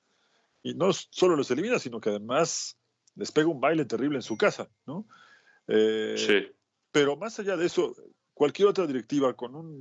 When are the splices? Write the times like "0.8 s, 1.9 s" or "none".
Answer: none